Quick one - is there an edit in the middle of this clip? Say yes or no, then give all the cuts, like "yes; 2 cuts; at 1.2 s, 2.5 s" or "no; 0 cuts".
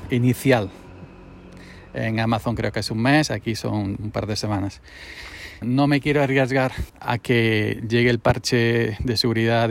yes; 2 cuts; at 5.6 s, 6.9 s